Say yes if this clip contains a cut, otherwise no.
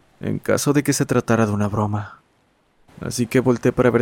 yes